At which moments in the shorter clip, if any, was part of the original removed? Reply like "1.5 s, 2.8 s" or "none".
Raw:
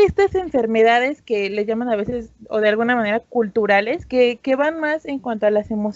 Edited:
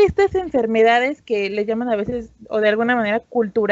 none